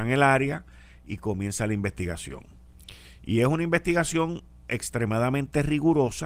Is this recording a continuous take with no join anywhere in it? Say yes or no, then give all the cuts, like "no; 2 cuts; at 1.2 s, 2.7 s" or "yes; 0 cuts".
yes; 0 cuts